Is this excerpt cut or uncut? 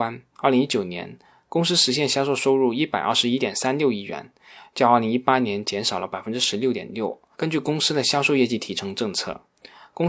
cut